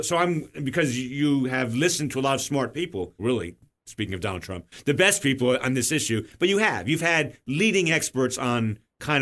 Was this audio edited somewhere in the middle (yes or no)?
yes